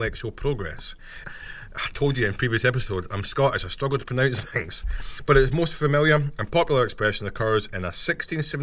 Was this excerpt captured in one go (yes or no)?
no